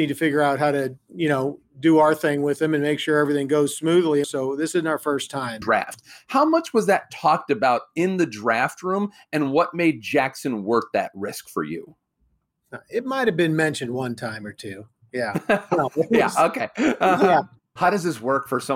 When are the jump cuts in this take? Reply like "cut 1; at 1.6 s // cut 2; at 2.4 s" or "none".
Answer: cut 1; at 4.2 s // cut 2; at 5.6 s // cut 3; at 17.6 s